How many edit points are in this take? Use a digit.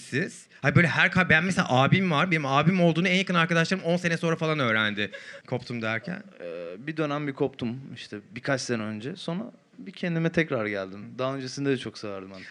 1